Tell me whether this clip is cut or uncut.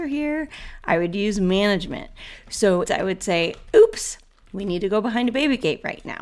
cut